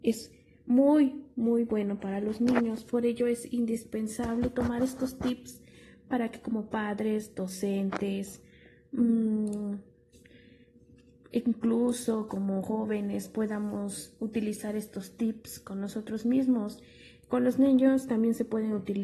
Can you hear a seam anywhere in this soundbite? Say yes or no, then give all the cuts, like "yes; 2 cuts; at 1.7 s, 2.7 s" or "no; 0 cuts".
no; 0 cuts